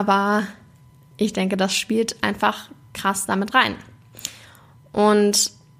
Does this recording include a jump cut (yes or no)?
no